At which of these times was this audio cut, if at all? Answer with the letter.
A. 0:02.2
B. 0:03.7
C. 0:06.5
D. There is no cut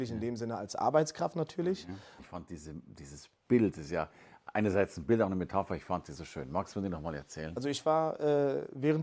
A